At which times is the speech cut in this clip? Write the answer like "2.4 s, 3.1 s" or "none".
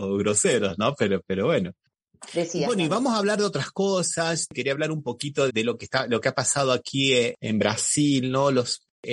5.5 s